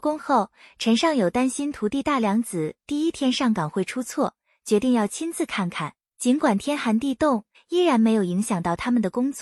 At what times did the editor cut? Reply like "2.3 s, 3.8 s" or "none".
6.1 s, 7.5 s